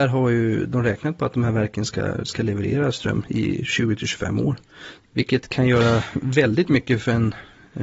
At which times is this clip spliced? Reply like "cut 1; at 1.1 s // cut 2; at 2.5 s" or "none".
cut 1; at 5.0 s